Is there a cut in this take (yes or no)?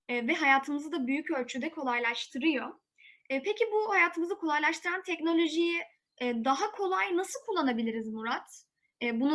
no